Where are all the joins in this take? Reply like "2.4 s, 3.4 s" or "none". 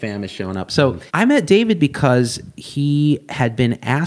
1.1 s